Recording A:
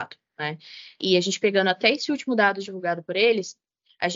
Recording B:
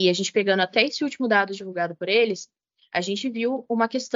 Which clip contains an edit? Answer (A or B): A